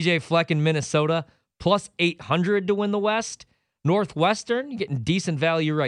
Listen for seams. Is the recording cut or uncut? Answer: uncut